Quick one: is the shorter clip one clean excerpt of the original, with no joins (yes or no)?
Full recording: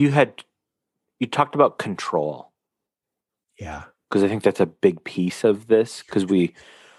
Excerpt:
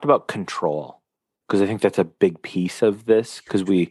no